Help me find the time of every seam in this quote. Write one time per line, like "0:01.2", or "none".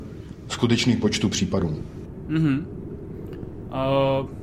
none